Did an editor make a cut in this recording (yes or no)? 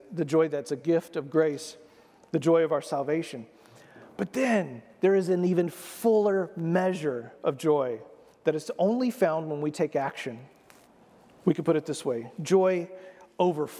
no